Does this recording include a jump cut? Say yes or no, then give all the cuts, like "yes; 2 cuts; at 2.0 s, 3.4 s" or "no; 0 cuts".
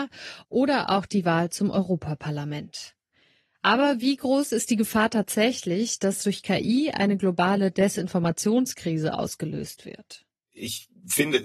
no; 0 cuts